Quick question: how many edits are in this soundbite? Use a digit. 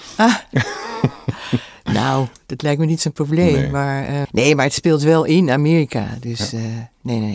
1